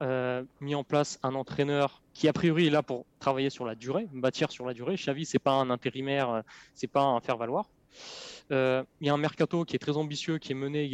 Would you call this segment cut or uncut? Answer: uncut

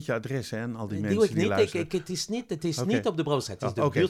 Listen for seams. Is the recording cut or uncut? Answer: uncut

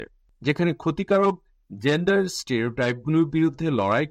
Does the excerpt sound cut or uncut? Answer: uncut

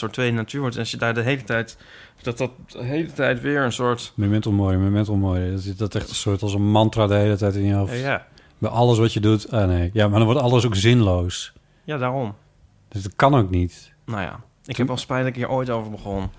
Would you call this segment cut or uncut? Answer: uncut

